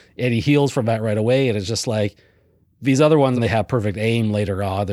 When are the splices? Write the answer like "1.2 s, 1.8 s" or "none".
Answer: 3.4 s